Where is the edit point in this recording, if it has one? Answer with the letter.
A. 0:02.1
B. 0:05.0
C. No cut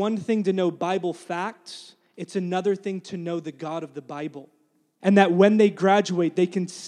B